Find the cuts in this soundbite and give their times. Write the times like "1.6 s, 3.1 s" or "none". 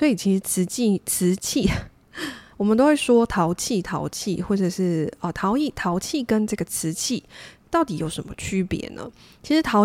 2.5 s